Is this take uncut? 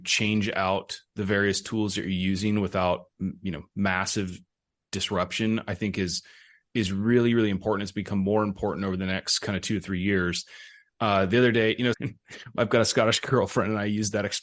no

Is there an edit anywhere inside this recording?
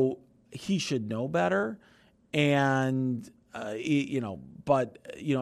no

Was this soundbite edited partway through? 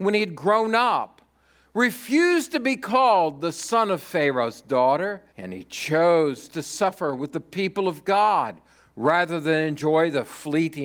yes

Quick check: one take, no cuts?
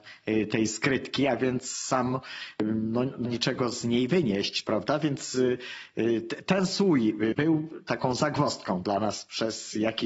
no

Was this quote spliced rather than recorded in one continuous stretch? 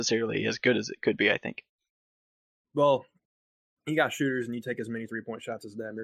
no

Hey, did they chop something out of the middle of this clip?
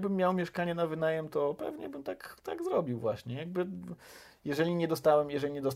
no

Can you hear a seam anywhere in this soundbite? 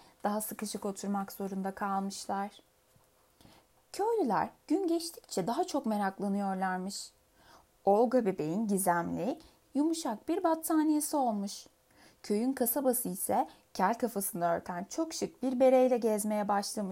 yes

